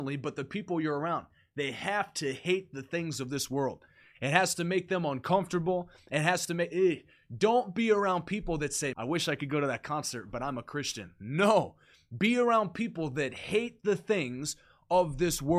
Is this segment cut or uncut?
cut